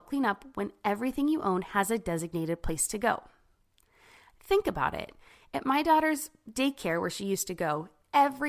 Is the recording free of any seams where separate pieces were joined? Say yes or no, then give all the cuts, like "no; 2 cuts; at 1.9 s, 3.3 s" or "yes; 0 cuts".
yes; 0 cuts